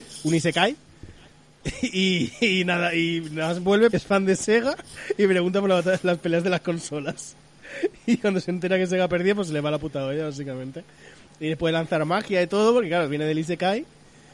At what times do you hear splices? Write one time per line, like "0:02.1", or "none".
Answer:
0:03.9